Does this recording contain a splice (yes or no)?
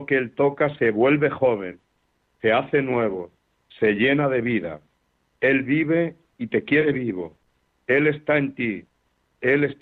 no